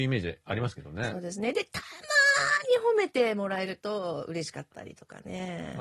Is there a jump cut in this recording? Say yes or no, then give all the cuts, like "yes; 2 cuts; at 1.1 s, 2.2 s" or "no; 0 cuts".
no; 0 cuts